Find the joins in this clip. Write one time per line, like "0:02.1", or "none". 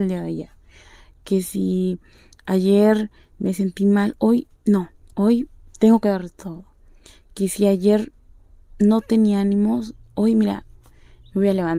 none